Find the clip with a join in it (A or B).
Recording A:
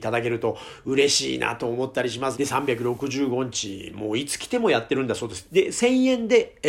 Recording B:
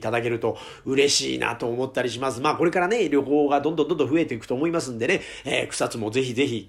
A